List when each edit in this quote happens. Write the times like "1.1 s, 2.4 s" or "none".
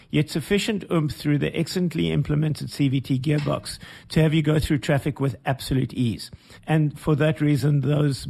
6.6 s

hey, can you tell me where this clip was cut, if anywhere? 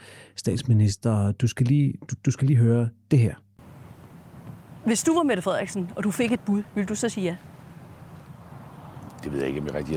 none

